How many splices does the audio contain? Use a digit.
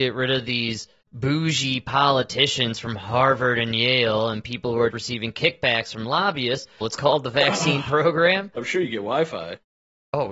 3